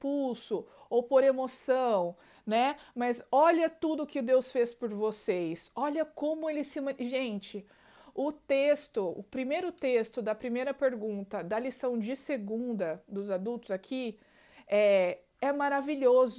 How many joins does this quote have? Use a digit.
0